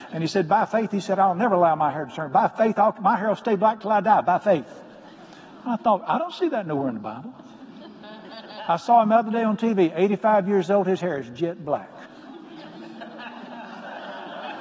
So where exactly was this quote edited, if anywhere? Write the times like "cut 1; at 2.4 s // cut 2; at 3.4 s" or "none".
none